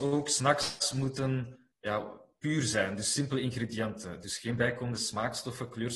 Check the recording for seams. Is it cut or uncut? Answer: cut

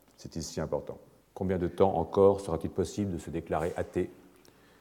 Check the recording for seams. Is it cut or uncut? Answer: cut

